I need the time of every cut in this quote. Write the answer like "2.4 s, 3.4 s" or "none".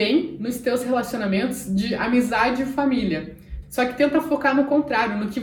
3.6 s